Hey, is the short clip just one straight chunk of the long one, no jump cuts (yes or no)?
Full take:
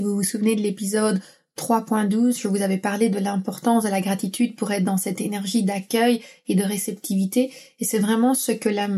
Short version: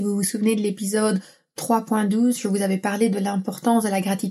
yes